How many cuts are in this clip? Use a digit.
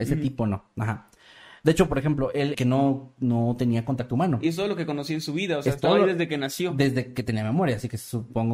1